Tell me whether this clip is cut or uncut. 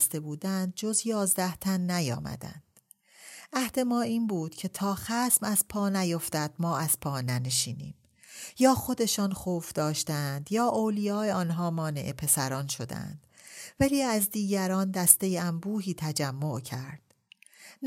uncut